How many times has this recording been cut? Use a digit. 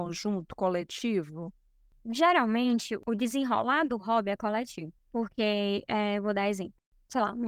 0